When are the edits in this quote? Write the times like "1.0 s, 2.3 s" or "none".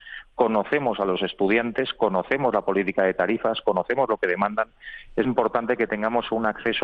5.2 s